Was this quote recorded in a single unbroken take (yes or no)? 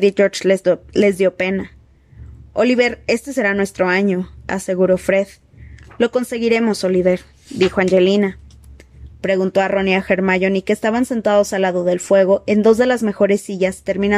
no